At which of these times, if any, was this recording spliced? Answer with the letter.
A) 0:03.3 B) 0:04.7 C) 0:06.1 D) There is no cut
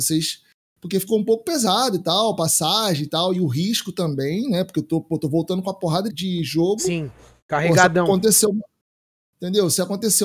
C